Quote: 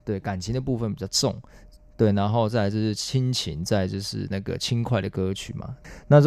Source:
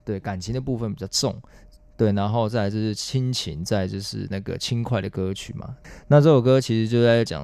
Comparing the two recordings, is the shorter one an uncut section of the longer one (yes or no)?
yes